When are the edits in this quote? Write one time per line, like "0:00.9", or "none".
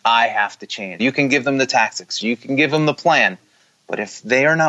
0:01.0
0:02.2